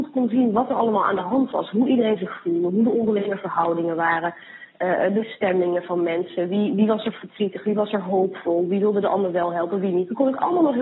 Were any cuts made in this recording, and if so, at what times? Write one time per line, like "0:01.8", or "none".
none